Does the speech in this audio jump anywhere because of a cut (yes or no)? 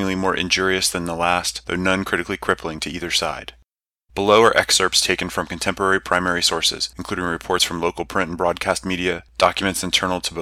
no